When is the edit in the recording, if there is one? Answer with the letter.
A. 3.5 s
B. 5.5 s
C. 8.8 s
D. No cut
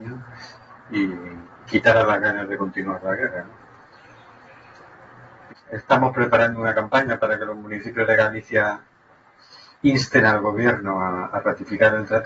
B